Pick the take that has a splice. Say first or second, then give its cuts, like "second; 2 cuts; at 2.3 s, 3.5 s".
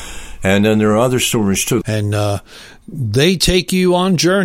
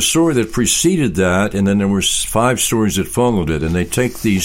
first; 1 cut; at 1.8 s